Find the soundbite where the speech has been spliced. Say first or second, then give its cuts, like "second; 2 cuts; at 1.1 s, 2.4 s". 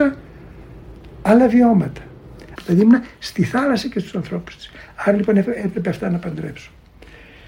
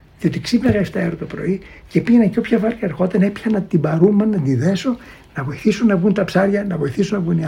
first; 1 cut; at 2.6 s